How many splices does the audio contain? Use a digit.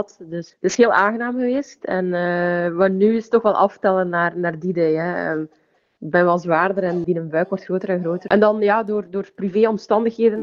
2